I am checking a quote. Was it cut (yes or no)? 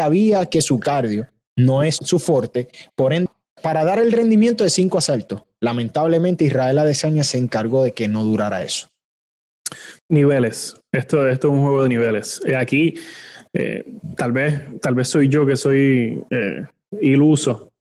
yes